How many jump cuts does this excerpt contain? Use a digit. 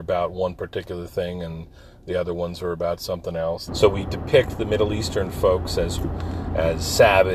1